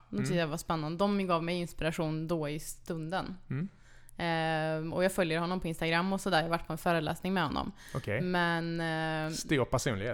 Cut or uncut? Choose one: uncut